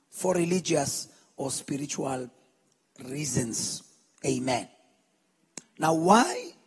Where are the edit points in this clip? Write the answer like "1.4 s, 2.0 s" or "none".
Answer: 5.6 s